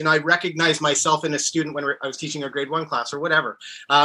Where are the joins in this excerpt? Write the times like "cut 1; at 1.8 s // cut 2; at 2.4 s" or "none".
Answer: none